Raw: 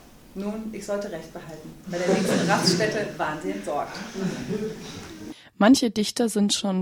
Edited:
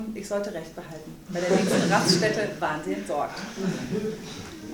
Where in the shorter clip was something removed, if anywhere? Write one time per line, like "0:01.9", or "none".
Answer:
none